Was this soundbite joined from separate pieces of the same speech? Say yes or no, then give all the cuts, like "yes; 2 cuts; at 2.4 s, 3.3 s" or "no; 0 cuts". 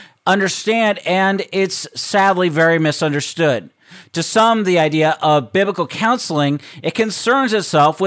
no; 0 cuts